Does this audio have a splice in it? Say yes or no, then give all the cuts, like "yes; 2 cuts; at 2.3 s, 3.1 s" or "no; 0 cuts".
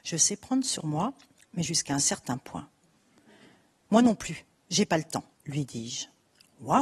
yes; 1 cut; at 5.3 s